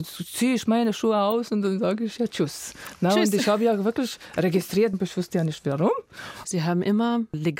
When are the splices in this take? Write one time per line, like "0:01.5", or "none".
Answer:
0:04.9
0:06.4